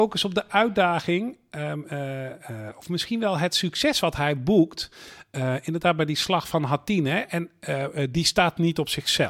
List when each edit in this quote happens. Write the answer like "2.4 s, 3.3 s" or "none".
none